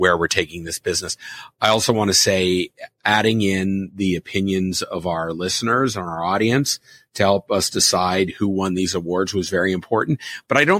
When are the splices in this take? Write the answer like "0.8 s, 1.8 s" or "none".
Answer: none